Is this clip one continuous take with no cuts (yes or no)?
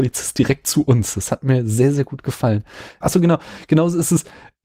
no